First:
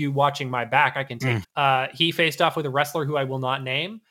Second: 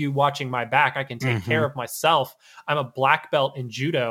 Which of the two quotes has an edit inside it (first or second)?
first